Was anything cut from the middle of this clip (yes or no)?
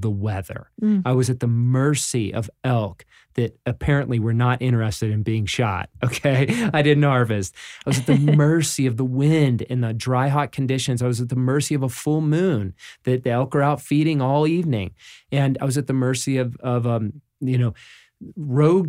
no